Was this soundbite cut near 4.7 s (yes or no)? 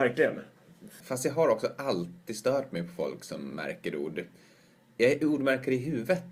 no